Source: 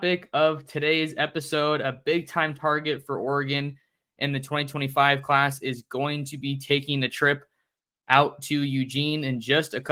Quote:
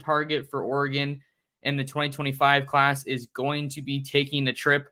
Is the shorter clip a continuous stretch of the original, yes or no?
yes